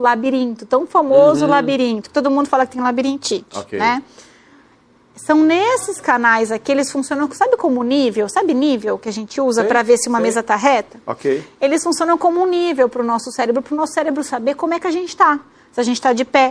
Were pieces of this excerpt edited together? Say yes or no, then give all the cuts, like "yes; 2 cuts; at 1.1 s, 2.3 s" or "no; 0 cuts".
no; 0 cuts